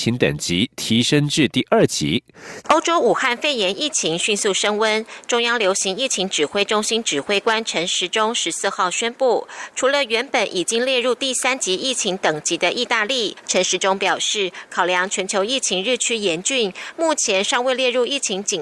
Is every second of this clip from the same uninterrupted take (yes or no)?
no